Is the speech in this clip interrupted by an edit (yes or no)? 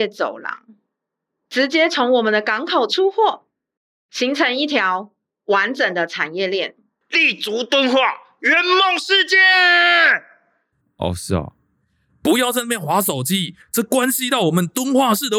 yes